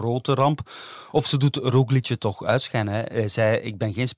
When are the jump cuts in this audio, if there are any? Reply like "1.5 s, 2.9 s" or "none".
none